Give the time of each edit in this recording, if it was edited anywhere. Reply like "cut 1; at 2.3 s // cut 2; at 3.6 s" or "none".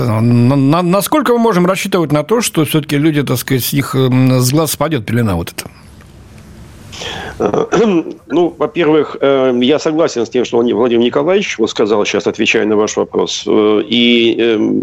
none